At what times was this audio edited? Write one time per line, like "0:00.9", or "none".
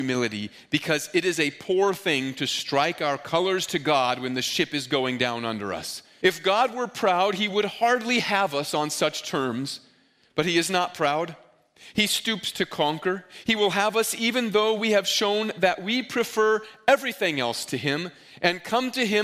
0:06.2